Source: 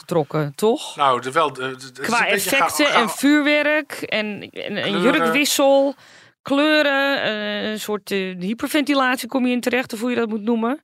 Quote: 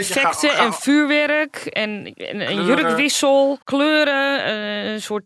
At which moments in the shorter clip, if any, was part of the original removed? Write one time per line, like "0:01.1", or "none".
0:03.6